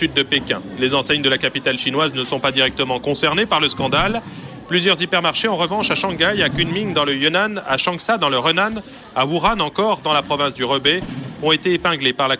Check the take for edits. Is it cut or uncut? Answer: uncut